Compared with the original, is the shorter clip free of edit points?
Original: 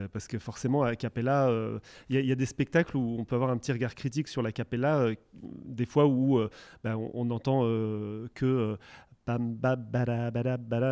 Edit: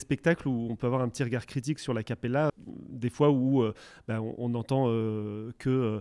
no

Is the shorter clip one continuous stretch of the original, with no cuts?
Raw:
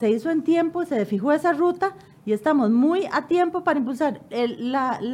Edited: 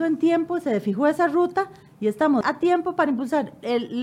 no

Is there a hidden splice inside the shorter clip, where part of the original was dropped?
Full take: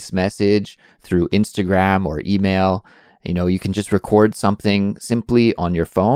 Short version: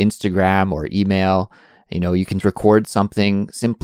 yes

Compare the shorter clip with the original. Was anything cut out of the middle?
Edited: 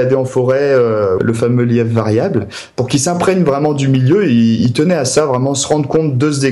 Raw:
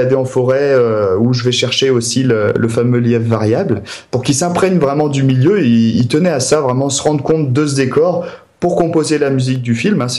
yes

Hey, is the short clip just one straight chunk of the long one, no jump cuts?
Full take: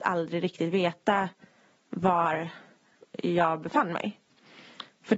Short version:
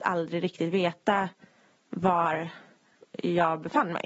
yes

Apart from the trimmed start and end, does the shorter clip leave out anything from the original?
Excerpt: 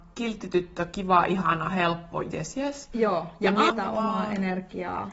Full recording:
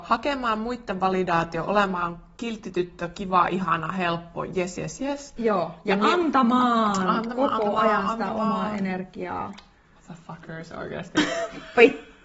yes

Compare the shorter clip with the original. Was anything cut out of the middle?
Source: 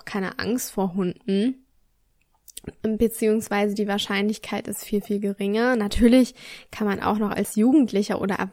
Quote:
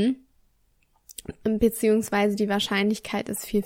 no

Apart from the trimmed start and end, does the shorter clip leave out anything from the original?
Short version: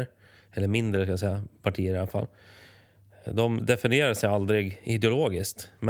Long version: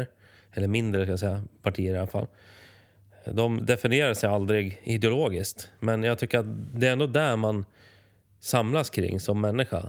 no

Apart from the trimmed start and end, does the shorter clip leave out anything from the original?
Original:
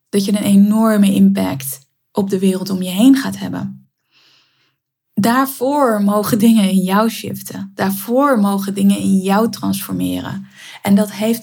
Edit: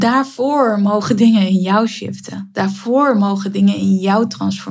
no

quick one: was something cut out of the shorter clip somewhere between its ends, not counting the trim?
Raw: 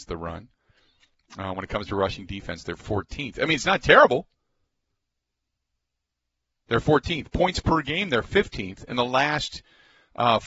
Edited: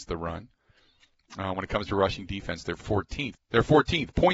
yes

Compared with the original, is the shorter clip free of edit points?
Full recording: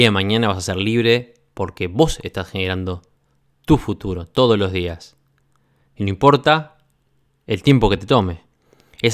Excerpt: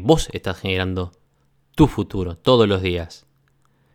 yes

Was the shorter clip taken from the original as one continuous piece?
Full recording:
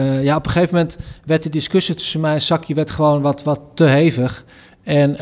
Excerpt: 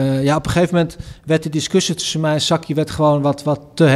yes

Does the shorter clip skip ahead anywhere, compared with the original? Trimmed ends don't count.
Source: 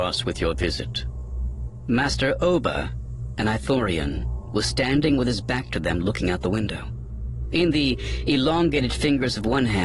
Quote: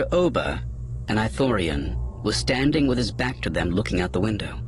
no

